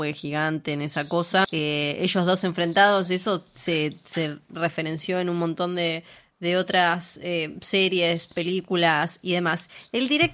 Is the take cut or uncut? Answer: cut